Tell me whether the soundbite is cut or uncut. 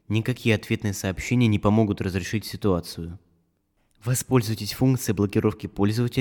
uncut